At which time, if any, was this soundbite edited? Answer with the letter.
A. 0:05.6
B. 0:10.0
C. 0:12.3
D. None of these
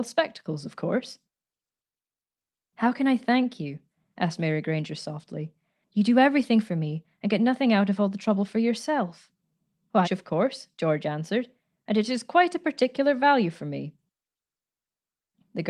B